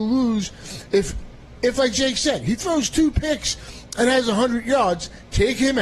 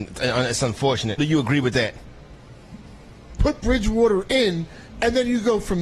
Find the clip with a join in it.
second; 2 cuts; at 1.2 s, 3.4 s

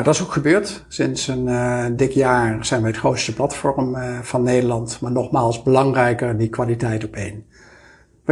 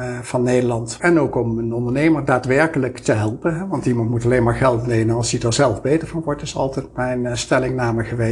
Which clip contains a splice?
second; 1 cut; at 1.0 s

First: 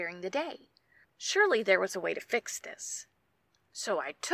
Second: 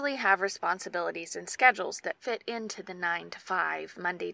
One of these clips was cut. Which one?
first; 1 cut; at 1.0 s

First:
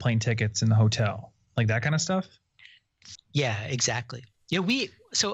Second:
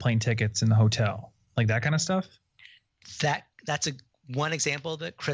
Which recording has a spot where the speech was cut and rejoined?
first; 1 cut; at 3.2 s

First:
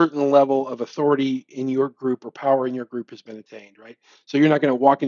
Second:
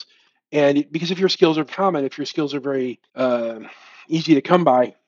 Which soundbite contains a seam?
second; 2 cuts; at 1.7 s, 3.1 s

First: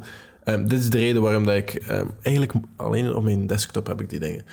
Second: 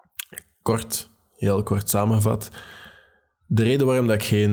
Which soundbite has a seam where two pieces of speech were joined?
first; 1 cut; at 2.8 s

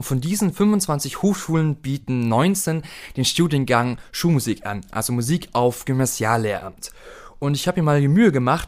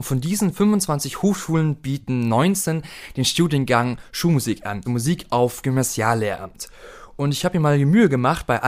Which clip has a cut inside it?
second; 1 cut; at 4.8 s

